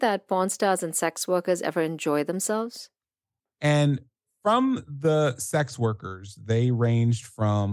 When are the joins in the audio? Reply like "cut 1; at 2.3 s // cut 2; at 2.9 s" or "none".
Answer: cut 1; at 3.4 s